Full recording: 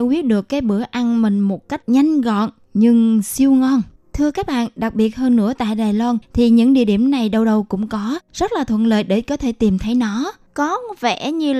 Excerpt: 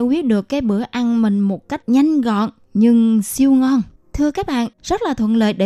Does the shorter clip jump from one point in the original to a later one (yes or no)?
yes